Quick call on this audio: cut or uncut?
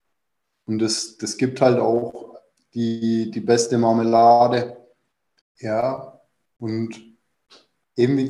cut